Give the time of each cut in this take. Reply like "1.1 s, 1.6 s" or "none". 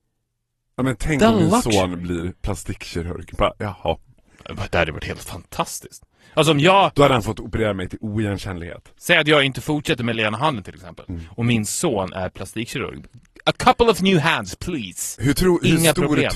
none